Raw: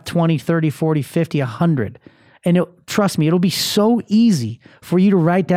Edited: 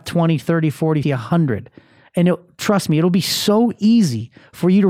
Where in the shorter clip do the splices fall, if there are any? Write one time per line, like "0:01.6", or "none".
0:01.0